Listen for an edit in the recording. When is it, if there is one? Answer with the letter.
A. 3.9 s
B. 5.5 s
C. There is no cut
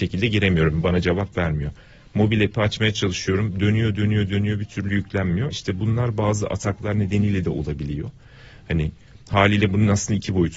C